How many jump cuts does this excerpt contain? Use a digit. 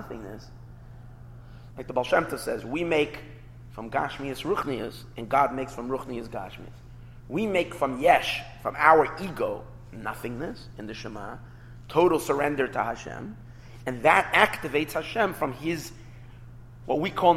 1